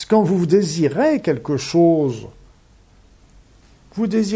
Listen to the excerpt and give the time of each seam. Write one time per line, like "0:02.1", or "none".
none